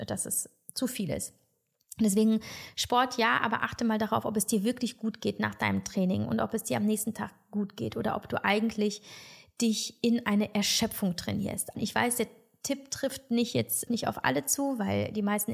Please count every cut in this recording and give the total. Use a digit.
2